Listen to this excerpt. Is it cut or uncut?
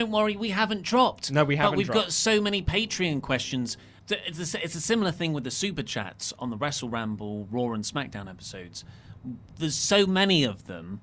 uncut